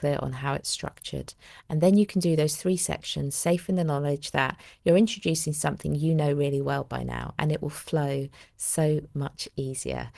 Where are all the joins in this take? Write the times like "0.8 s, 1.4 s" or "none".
none